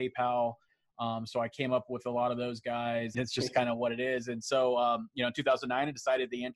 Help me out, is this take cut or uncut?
cut